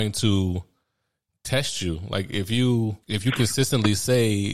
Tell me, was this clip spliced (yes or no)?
yes